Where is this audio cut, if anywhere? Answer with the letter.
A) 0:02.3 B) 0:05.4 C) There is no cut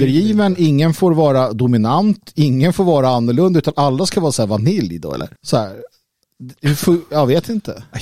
B